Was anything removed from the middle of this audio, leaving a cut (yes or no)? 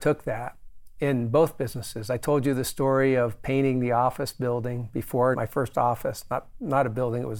yes